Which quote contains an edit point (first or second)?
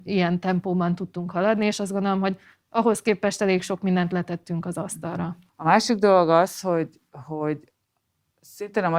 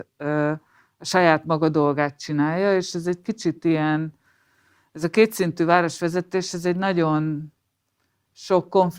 first